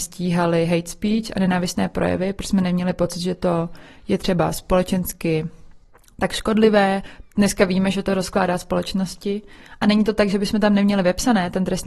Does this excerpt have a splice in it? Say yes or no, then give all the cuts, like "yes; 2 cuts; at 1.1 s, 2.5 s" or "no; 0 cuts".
no; 0 cuts